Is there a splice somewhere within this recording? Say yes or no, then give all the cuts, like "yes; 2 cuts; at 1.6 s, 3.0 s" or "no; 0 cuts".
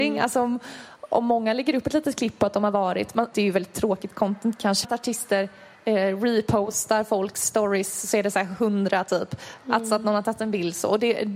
yes; 2 cuts; at 3.3 s, 4.8 s